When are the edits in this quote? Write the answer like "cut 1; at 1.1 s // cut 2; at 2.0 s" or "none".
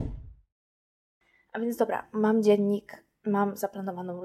none